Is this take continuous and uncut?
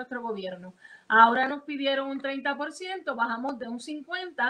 yes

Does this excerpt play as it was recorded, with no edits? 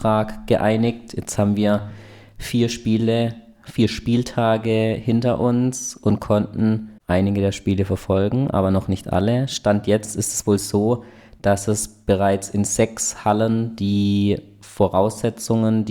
no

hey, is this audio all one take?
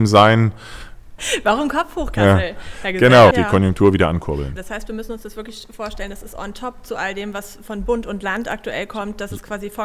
no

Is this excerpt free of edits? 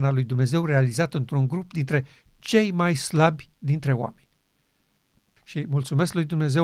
no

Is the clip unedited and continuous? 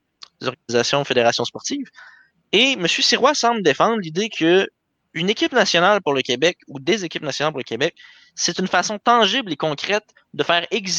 yes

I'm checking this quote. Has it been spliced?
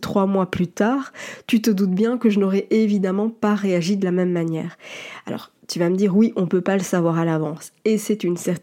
no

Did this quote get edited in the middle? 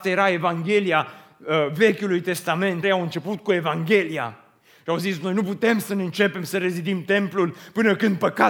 yes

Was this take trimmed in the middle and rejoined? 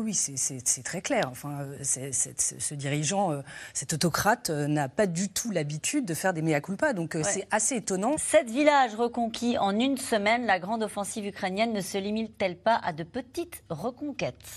yes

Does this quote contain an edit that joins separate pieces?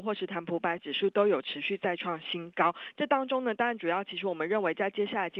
no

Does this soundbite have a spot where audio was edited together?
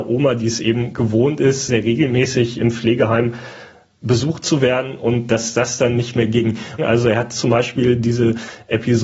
yes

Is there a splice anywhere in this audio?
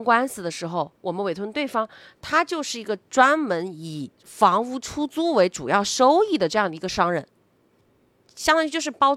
yes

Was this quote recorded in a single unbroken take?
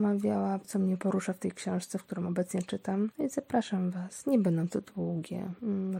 yes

